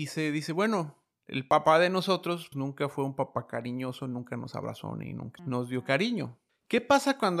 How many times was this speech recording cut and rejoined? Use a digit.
2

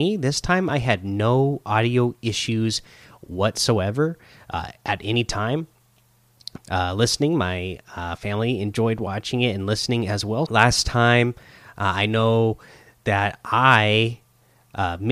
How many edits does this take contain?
2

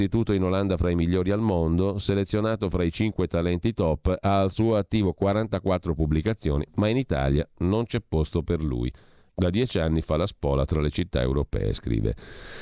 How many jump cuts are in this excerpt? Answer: 1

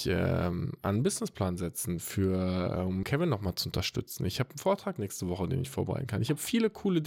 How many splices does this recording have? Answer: 1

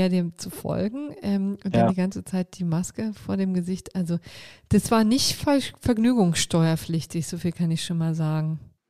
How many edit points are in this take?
0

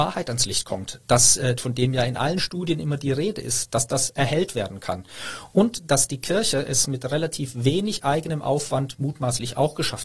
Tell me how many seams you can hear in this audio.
1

